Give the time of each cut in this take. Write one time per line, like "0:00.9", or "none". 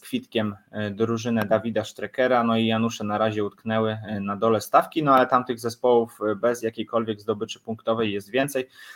none